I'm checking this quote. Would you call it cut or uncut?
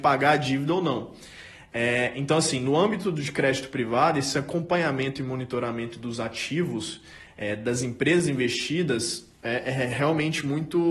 uncut